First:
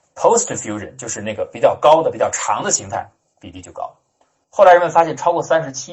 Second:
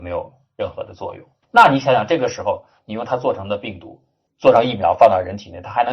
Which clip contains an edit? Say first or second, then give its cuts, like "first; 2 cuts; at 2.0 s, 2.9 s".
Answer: second; 1 cut; at 1.4 s